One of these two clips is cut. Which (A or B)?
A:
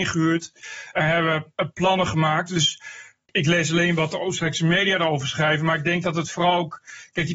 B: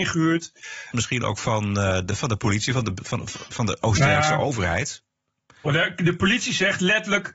B